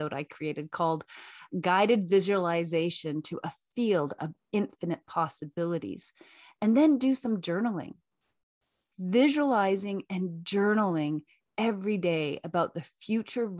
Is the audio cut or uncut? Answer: uncut